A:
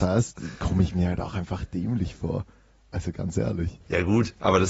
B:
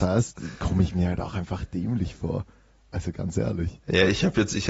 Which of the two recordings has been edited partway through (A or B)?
A